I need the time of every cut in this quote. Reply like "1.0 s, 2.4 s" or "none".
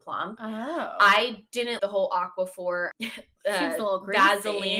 1.8 s, 2.9 s